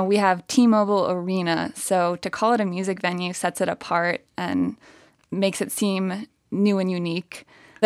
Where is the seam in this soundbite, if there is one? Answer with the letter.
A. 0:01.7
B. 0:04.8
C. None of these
C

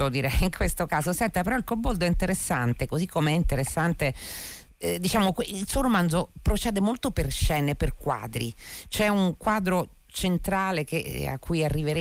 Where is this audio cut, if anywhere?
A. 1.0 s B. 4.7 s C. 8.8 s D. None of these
D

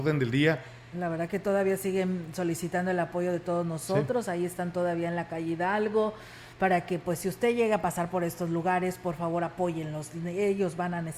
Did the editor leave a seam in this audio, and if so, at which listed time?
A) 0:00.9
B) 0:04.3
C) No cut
A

